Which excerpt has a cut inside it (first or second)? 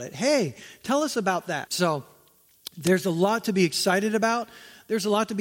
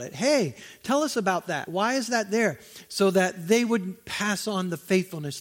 first